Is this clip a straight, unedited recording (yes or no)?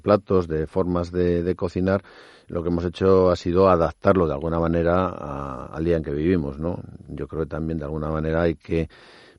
yes